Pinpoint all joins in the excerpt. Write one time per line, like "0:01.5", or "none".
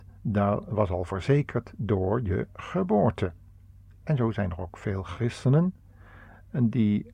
none